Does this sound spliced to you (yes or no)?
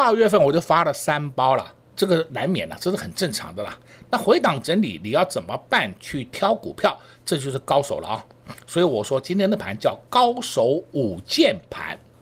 yes